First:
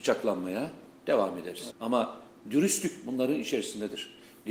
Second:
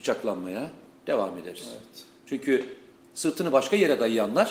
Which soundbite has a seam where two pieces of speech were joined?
first; 1 cut; at 1.7 s

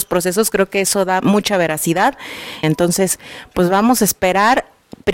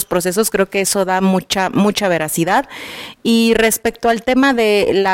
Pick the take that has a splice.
first; 2 cuts; at 1.2 s, 2.6 s

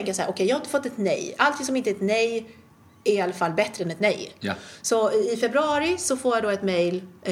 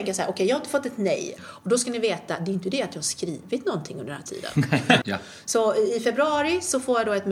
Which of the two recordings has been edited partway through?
second; 2 cuts; at 1.4 s, 5.0 s

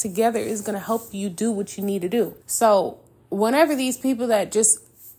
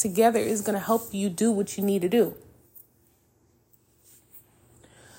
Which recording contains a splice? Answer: first; 1 cut; at 2.4 s

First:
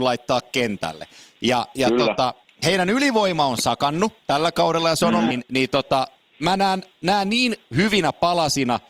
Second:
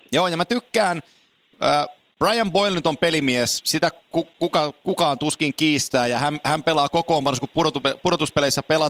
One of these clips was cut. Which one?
first; 1 cut; at 5.3 s

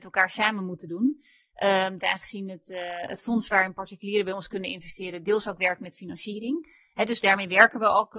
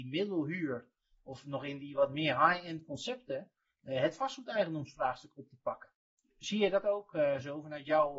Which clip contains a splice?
first; 1 cut; at 2.0 s

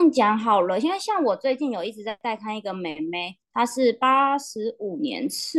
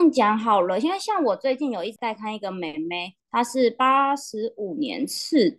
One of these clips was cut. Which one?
second; 1 cut; at 2.0 s

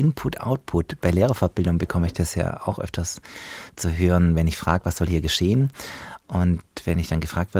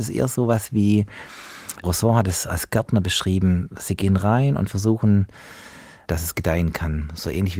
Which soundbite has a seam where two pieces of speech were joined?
second; 2 cuts; at 1.8 s, 6.1 s

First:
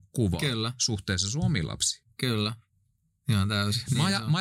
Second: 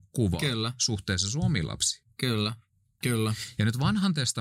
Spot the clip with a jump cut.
second; 1 cut; at 3.0 s

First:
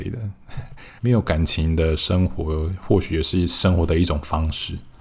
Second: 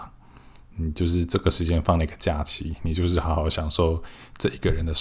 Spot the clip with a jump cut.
first; 1 cut; at 1.0 s

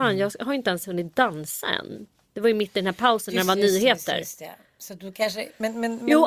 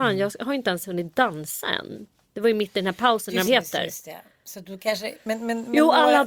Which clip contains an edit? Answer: second; 1 cut; at 3.5 s

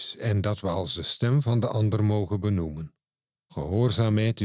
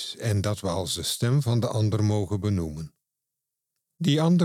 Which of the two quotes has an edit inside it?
first; 1 cut; at 3.3 s

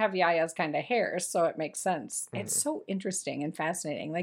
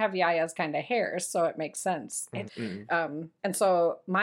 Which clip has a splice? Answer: second; 1 cut; at 2.5 s

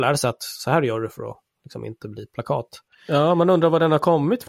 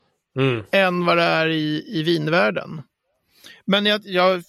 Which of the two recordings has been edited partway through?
first; 1 cut; at 2.9 s

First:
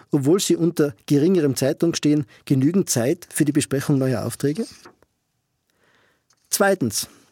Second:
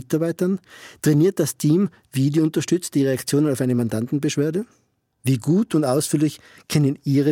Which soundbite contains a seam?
second; 1 cut; at 5.1 s

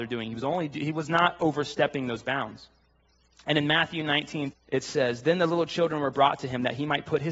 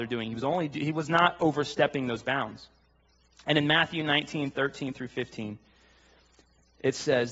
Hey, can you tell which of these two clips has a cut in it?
first; 1 cut; at 4.5 s

